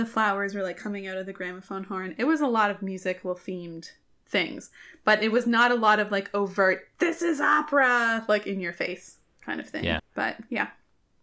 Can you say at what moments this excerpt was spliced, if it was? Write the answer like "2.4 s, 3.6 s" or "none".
10.0 s

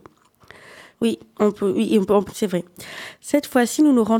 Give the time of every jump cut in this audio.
0.9 s, 2.3 s

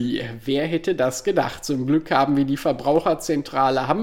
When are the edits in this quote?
none

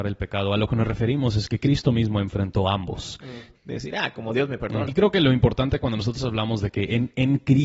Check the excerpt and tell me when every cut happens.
3.5 s, 4.9 s

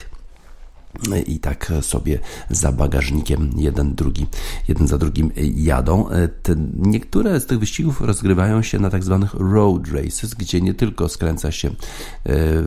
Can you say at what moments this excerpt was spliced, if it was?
none

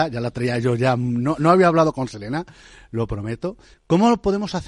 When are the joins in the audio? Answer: 3.7 s

